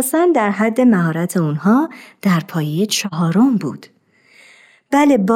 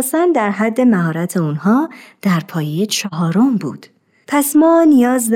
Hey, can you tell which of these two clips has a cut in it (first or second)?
second